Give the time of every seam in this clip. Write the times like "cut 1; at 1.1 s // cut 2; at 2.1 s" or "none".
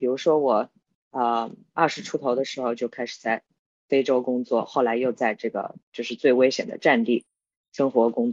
none